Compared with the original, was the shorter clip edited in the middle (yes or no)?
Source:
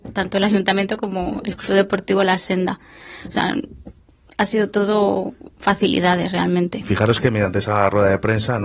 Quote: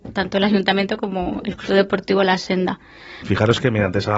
yes